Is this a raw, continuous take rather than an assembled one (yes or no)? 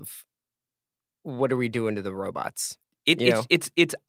yes